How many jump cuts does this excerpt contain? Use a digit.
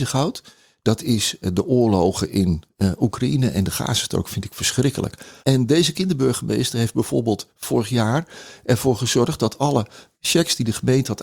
1